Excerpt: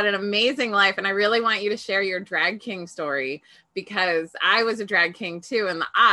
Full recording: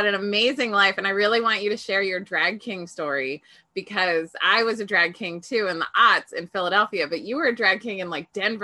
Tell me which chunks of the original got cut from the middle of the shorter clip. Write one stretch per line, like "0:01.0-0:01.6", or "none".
none